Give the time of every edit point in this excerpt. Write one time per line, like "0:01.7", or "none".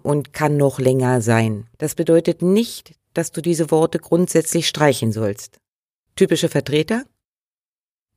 0:01.7
0:06.1